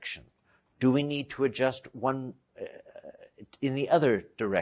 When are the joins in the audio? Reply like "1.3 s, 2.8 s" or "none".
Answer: 2.5 s

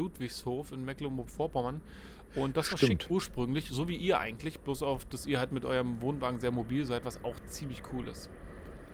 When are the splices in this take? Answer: 3.1 s

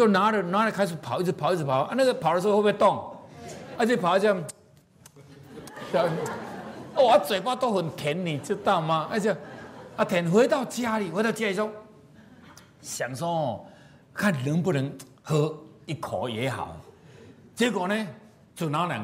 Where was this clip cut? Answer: 3.7 s

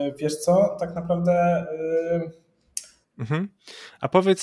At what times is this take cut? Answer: 3.0 s

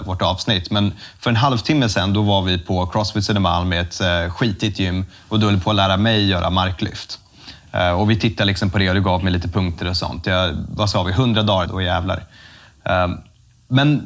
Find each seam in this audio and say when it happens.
11.7 s

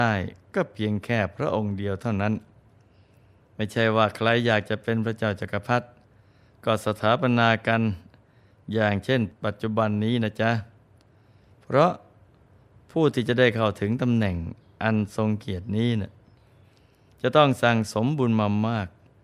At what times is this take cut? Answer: none

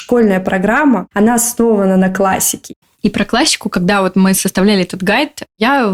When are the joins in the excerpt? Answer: 2.9 s

